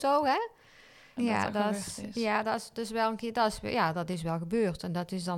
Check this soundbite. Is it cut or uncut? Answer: cut